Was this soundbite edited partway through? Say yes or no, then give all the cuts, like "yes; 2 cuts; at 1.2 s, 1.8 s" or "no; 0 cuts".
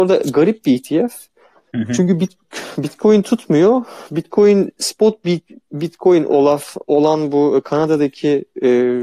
no; 0 cuts